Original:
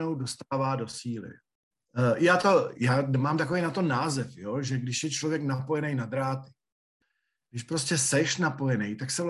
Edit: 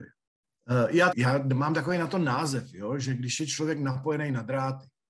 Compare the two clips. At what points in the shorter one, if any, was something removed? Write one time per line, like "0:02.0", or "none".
0:01.1